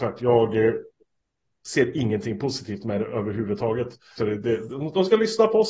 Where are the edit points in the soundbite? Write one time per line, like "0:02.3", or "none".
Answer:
0:04.2